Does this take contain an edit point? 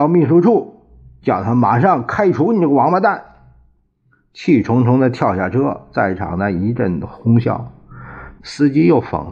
yes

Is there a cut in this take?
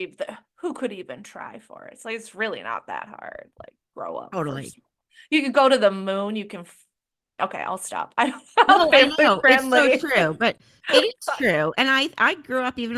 no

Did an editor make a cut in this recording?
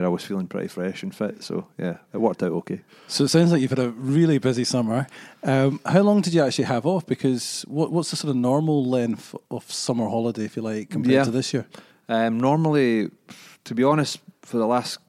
no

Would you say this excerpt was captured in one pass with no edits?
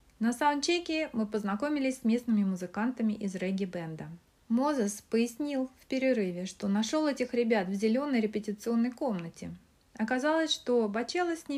no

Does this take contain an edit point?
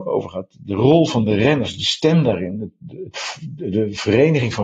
no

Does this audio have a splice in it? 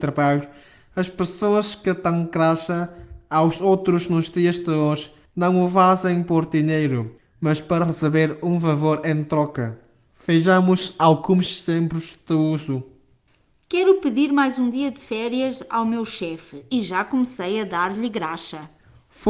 no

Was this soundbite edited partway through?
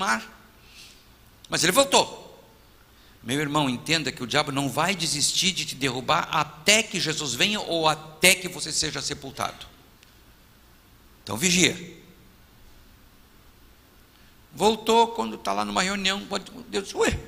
no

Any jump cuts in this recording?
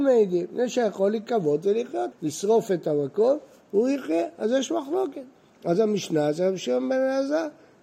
yes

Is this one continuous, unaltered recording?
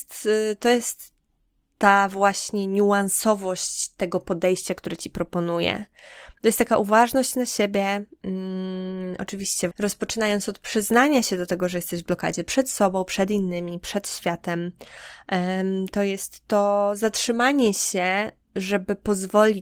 no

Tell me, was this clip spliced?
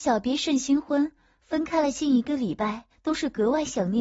yes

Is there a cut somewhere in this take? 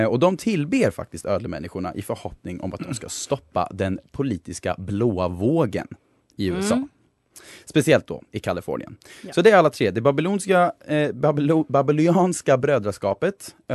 no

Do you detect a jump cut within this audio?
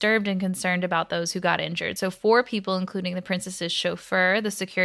no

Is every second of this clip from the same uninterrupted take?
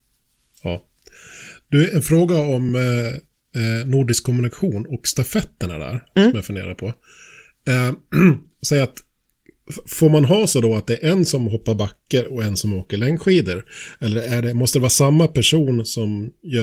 yes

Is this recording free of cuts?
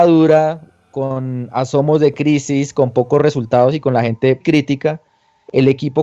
no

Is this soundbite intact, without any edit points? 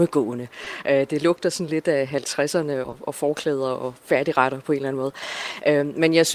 no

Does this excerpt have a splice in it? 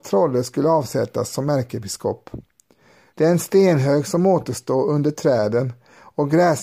yes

